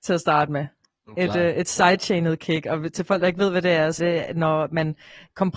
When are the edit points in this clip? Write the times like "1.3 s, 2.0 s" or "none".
4.0 s